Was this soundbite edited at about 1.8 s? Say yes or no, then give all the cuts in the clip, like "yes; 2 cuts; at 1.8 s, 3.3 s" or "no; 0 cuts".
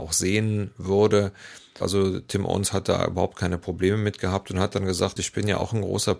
yes; 2 cuts; at 1.8 s, 5.2 s